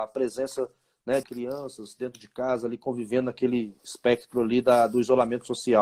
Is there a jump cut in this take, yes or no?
yes